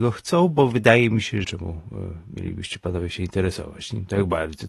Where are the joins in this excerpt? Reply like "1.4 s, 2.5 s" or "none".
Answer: 1.4 s

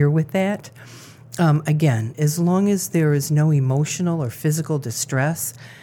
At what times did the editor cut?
2.1 s

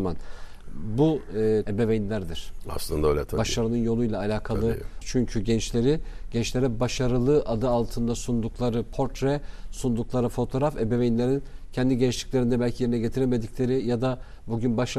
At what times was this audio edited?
1.6 s, 5.0 s

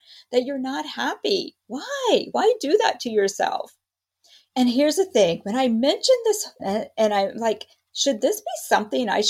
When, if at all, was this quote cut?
4.5 s, 6.6 s

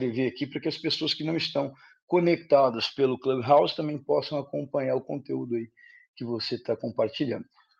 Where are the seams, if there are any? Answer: none

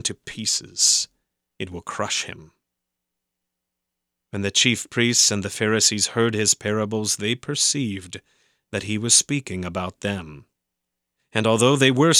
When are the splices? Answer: 1.5 s

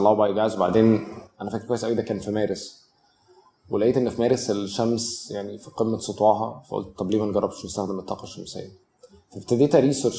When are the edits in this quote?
none

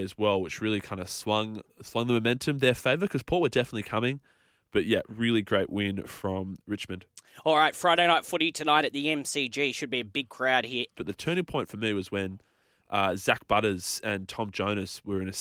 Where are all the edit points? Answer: 5.0 s, 10.9 s

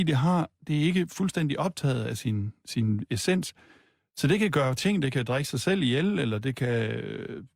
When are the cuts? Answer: none

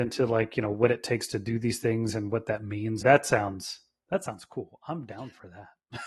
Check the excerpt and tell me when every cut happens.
3.0 s

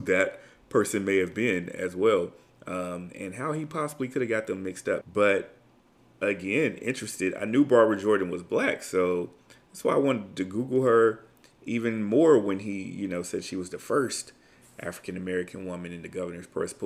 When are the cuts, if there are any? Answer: 5.0 s

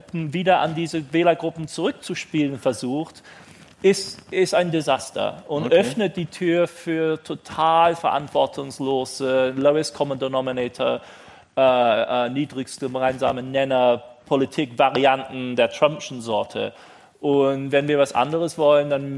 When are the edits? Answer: none

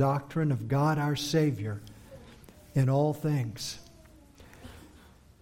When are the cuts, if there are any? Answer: none

